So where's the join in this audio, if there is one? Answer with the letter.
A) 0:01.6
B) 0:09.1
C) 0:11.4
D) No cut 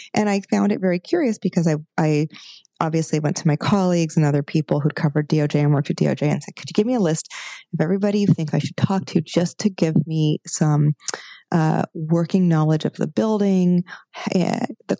D